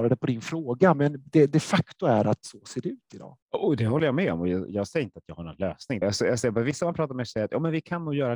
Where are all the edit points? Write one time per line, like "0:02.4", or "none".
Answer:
0:03.4
0:06.0